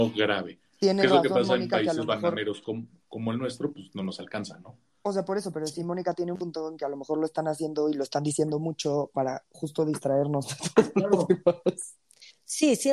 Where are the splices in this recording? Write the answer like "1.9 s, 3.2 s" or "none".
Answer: none

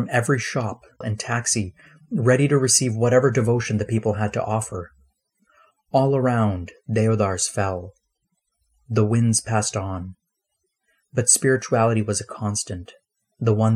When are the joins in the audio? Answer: 1.0 s

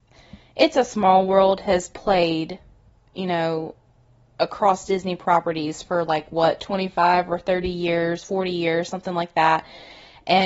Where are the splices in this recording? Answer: none

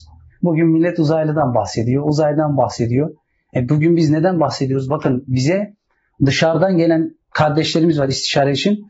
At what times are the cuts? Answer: none

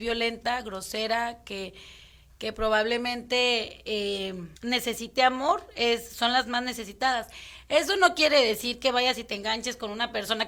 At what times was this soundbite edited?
4.6 s

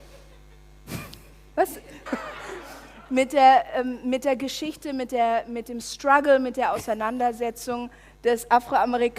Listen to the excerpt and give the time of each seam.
2.1 s

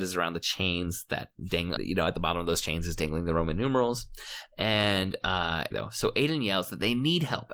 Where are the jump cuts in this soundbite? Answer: 1.8 s, 5.7 s

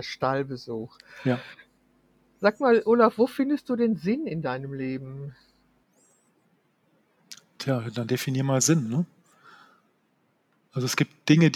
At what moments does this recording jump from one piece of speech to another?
none

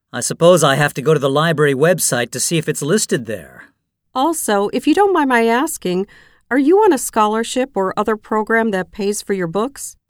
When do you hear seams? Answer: none

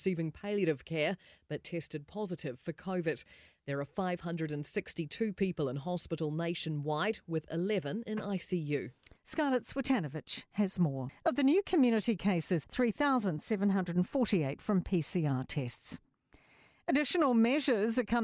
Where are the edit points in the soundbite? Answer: 9.2 s, 11.1 s, 12.6 s

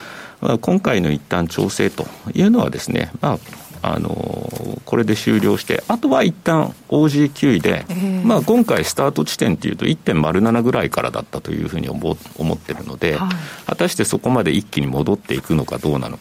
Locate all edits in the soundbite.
7.9 s

